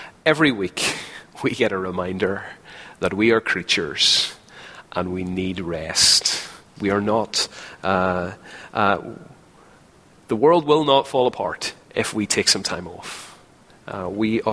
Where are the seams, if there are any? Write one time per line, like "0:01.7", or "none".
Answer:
0:06.8
0:11.8